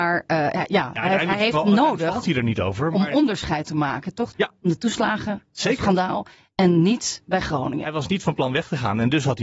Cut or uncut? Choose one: cut